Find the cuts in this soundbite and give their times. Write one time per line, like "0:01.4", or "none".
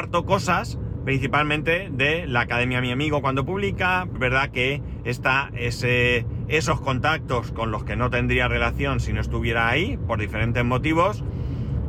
0:04.2